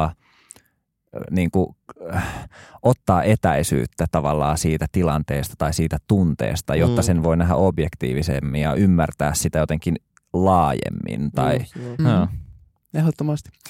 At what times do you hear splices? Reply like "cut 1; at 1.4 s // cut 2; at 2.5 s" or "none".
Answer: cut 1; at 12.0 s